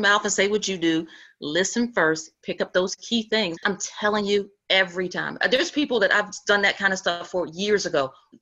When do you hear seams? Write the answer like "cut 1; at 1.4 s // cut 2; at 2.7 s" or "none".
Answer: cut 1; at 3.6 s